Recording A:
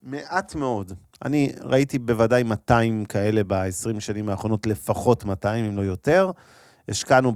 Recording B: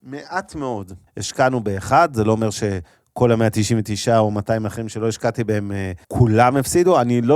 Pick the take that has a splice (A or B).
B